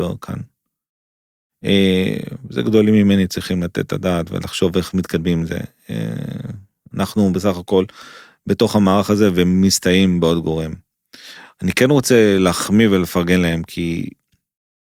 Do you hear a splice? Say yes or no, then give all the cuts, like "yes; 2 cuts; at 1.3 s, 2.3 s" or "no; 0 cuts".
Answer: no; 0 cuts